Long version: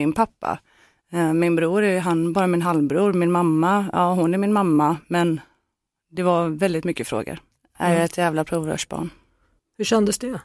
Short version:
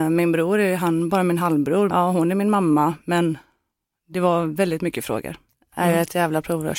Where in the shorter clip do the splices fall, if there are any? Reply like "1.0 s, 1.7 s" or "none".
1.9 s